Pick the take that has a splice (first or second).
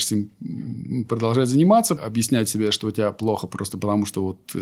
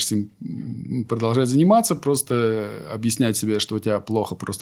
first